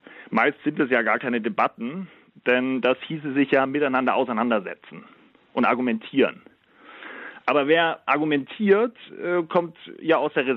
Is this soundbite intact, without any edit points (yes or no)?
yes